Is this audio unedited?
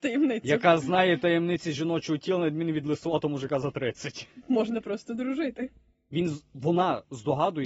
yes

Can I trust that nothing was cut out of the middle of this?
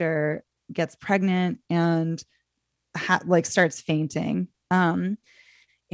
yes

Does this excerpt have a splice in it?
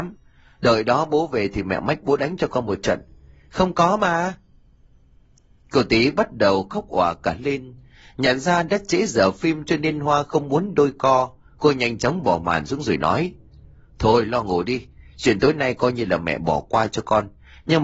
yes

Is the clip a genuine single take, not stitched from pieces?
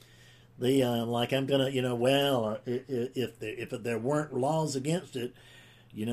no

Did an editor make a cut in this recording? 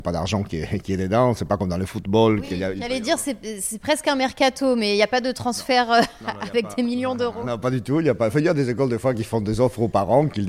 no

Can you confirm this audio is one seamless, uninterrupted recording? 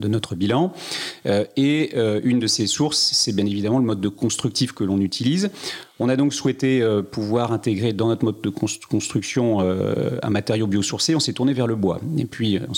yes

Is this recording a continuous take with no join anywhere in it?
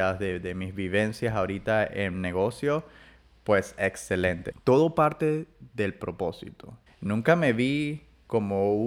no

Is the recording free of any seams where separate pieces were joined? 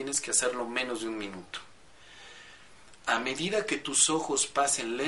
yes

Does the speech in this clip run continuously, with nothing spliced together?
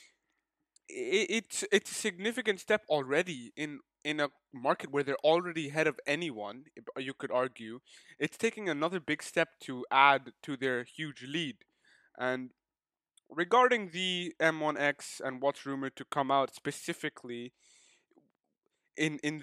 yes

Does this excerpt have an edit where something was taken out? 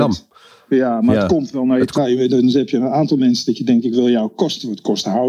yes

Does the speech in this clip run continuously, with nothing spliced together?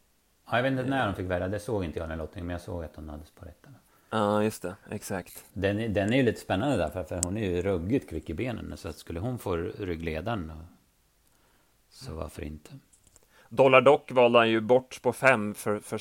yes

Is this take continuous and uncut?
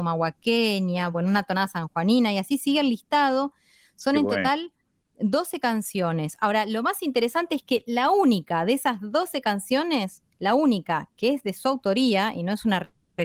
yes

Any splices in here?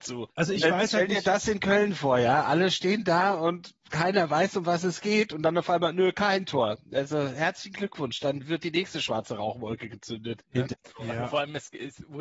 no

